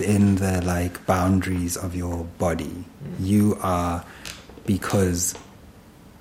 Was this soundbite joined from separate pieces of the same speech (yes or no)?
no